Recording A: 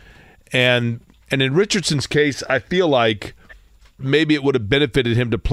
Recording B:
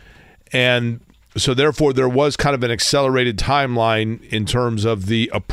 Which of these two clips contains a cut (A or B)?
A